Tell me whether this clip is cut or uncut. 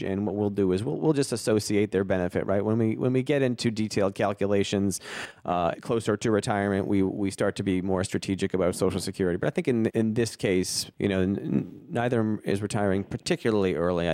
cut